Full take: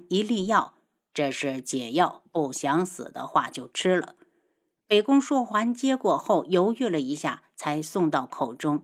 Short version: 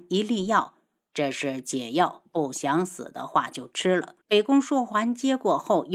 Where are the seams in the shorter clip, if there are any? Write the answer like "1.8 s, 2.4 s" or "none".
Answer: 4.2 s